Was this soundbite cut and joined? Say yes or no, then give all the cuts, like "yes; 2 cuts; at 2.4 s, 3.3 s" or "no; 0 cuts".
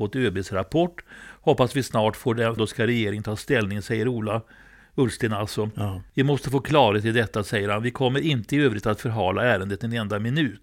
yes; 1 cut; at 2.6 s